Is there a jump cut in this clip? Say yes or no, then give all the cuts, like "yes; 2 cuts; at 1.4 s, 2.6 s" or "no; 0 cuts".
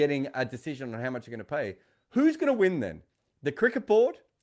no; 0 cuts